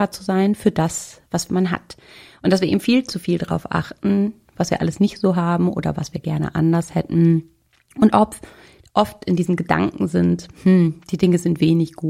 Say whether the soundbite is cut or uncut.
uncut